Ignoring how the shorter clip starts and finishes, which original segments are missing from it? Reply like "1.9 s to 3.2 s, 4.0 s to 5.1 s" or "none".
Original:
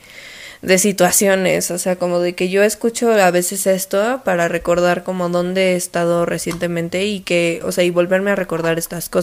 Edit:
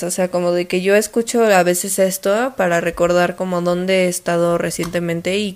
none